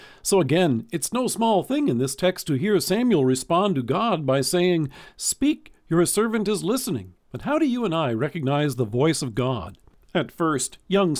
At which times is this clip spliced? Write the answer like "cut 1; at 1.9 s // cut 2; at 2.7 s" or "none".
cut 1; at 7.2 s